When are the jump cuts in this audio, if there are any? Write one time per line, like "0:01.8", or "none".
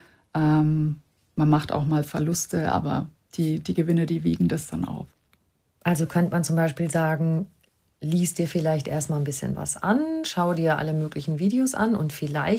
none